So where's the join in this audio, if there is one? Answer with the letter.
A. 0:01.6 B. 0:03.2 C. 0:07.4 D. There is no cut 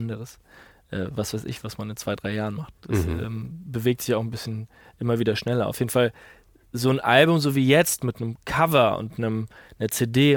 D